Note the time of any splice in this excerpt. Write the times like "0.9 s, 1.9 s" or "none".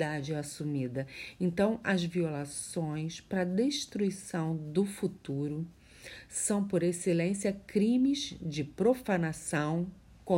none